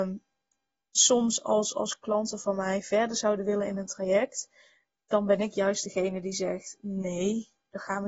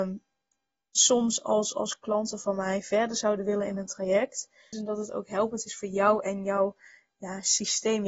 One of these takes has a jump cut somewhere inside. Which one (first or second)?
second